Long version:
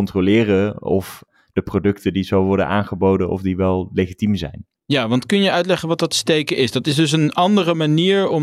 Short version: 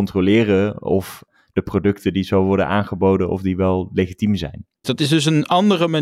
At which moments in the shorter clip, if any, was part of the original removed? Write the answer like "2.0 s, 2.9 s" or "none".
4.8 s